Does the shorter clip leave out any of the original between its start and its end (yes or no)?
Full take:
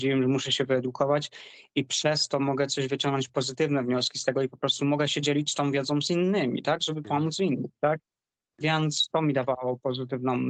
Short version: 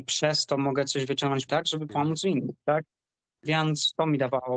yes